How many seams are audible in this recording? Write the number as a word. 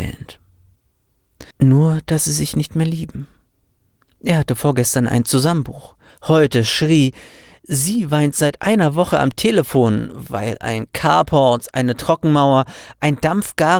one